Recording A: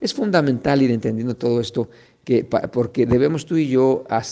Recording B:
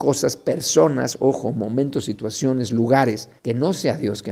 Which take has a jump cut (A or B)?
B